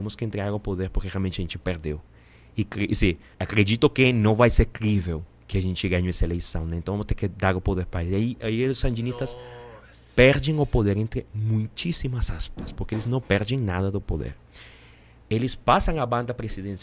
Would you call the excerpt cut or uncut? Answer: cut